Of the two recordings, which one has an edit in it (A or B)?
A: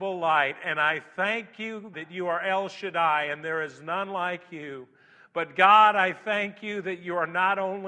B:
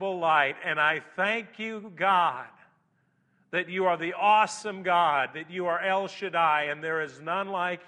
A